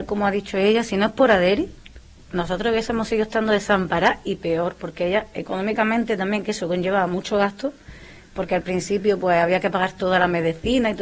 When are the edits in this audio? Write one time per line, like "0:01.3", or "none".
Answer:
none

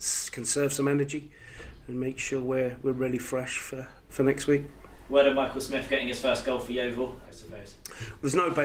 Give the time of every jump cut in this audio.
0:04.0
0:07.2

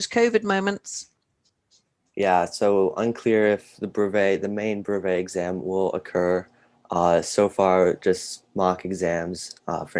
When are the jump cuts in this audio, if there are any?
none

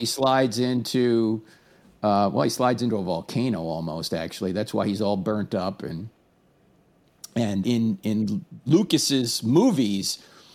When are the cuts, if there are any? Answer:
0:07.6

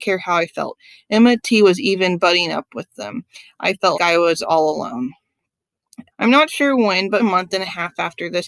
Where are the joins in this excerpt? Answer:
0:03.9
0:06.1
0:07.2

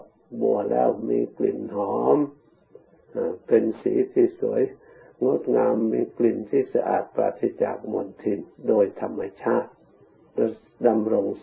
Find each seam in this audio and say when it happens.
none

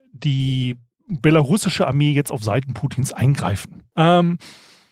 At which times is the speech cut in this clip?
0:03.9

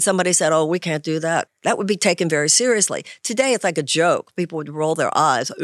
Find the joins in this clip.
0:01.5

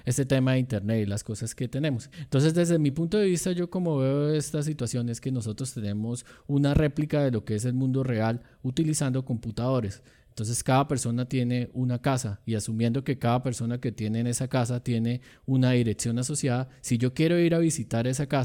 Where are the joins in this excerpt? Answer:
0:02.1

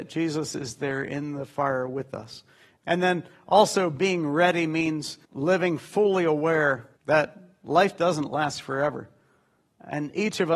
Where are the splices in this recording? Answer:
0:02.8
0:05.2
0:07.0

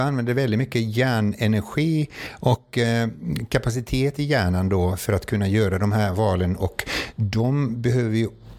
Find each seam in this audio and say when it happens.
none

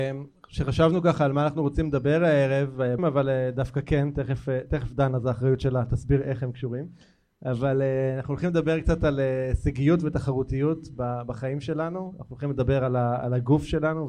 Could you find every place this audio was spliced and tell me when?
0:03.0

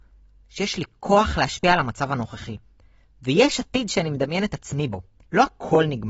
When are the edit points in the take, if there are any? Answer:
none

